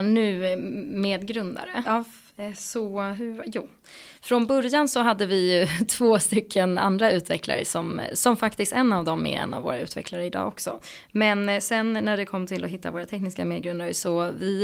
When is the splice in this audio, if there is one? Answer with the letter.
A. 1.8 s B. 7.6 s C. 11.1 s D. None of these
A